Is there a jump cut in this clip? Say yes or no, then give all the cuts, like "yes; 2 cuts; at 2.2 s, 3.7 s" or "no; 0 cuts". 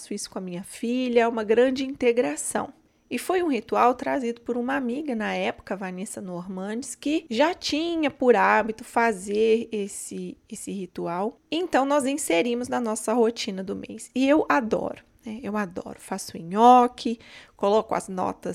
no; 0 cuts